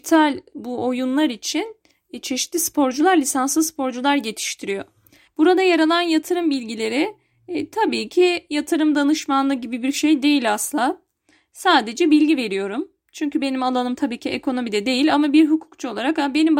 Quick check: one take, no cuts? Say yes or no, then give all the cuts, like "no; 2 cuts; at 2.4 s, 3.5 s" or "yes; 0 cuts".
no; 1 cut; at 5.3 s